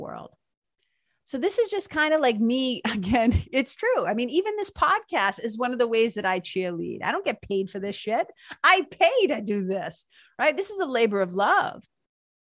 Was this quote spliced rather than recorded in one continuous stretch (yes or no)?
no